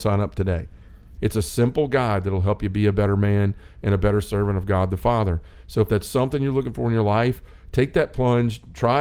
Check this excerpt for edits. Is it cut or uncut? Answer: cut